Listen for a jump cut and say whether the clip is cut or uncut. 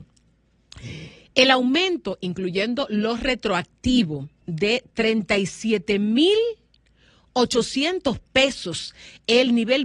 uncut